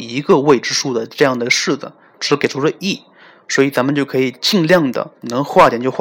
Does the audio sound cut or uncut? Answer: cut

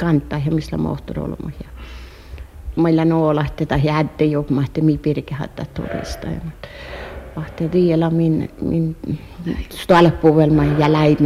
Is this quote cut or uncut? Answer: cut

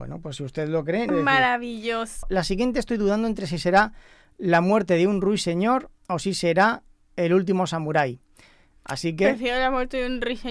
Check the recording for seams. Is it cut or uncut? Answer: cut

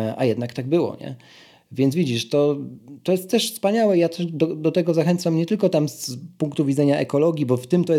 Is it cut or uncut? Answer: uncut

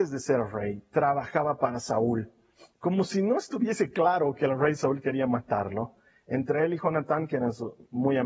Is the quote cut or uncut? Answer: cut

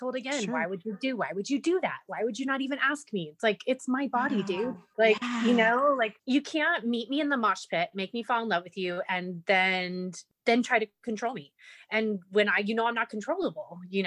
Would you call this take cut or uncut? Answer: uncut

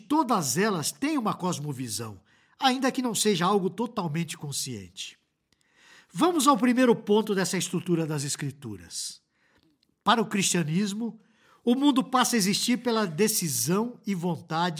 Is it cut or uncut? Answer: uncut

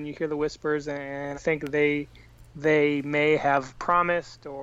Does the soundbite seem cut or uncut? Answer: cut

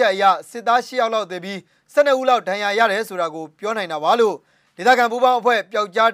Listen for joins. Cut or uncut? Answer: uncut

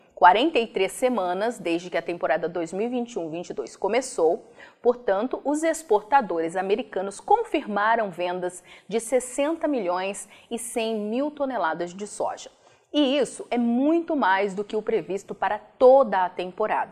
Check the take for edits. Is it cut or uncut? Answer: uncut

